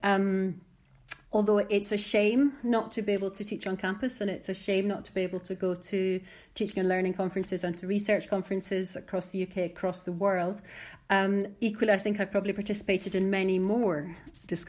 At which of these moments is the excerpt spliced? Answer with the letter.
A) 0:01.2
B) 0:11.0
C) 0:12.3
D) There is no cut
A